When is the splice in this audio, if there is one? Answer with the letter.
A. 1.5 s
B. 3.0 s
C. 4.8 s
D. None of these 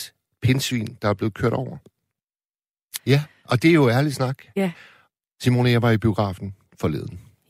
B